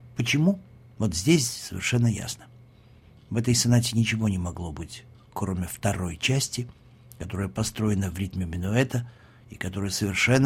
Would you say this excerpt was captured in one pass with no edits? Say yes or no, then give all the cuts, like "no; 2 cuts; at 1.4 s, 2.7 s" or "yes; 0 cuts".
yes; 0 cuts